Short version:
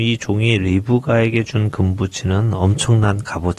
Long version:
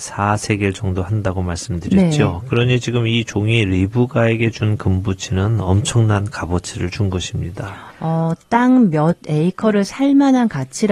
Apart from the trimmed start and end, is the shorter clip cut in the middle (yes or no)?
no